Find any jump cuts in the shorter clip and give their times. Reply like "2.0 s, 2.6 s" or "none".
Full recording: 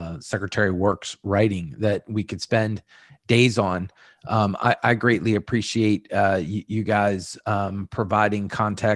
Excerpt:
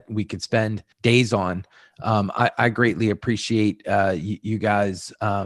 0.9 s